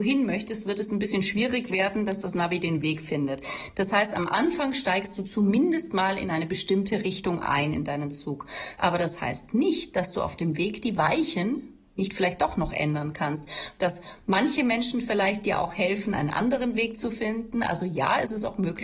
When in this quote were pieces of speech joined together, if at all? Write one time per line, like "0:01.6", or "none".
0:13.8